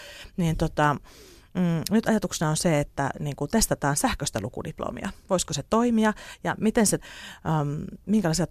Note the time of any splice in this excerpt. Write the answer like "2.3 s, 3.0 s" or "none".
7.0 s